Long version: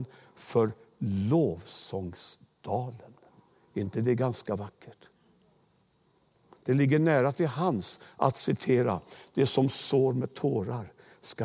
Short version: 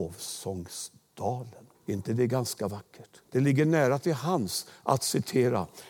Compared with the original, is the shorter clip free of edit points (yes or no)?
no